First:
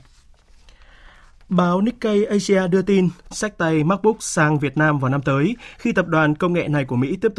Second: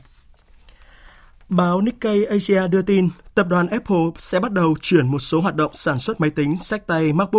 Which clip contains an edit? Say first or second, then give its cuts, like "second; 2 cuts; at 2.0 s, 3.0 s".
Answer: first; 1 cut; at 3.3 s